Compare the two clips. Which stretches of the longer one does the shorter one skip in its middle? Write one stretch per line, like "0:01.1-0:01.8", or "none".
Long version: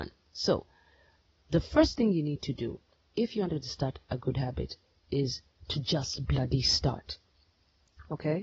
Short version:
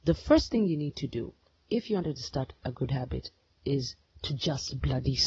none